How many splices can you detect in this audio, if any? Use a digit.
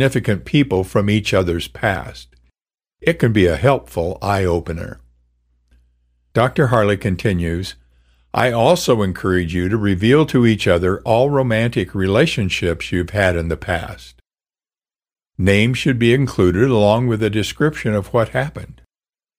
0